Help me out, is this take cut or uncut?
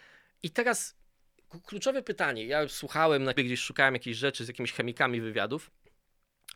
cut